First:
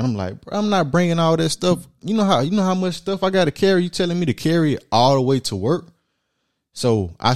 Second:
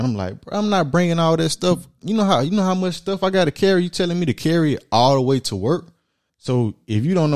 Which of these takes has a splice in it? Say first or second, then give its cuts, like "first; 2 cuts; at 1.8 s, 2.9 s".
second; 1 cut; at 6.3 s